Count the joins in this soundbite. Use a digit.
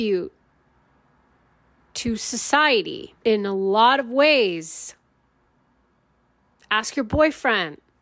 1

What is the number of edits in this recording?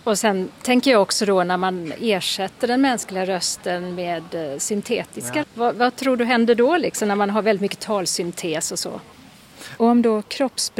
2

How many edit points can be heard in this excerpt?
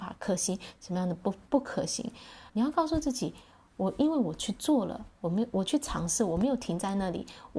1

